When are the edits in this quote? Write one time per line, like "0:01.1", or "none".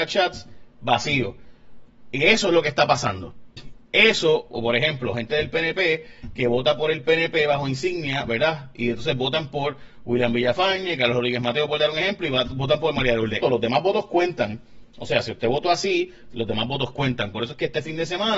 0:13.4
0:17.3